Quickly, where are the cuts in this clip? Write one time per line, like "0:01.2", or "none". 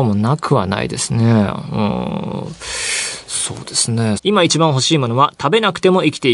0:04.2